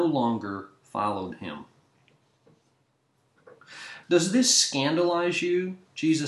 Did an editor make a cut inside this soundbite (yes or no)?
yes